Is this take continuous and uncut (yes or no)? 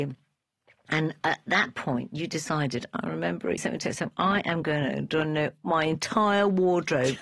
no